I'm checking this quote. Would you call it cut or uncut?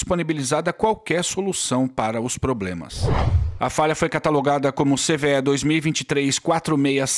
cut